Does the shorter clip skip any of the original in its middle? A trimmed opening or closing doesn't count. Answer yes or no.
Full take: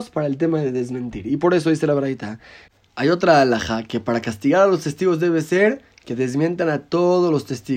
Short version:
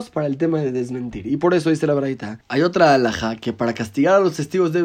yes